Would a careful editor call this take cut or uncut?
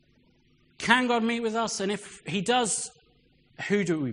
uncut